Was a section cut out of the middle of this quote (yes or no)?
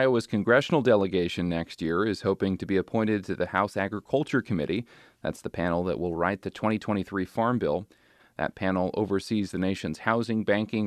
yes